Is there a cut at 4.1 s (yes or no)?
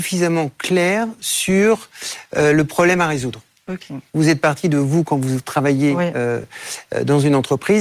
yes